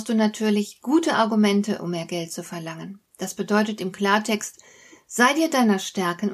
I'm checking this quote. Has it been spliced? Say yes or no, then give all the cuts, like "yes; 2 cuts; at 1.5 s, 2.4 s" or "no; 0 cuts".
no; 0 cuts